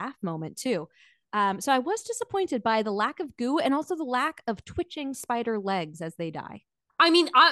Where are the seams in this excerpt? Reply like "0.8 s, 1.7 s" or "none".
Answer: none